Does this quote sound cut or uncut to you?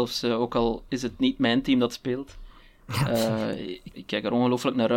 cut